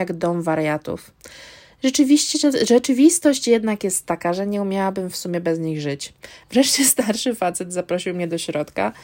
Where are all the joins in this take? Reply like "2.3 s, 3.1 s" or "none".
6.4 s